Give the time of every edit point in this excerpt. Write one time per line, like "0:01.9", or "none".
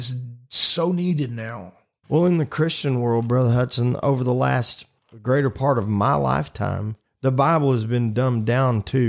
none